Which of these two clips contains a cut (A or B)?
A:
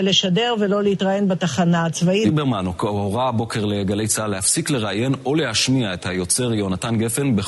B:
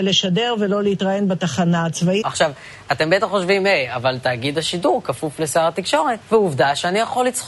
B